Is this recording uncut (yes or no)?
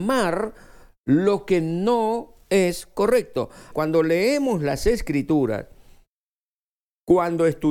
no